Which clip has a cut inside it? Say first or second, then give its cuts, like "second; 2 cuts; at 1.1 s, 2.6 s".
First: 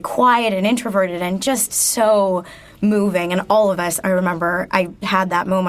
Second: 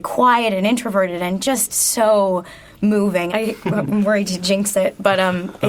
second; 1 cut; at 3.3 s